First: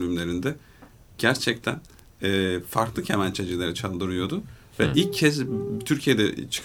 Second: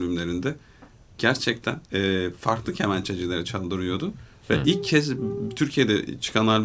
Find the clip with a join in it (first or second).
second